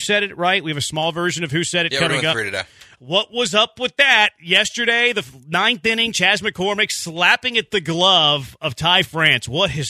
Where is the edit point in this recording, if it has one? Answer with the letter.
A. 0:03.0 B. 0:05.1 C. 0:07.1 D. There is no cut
A